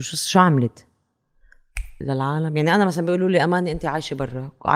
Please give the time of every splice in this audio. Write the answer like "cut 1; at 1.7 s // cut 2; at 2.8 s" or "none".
cut 1; at 2.0 s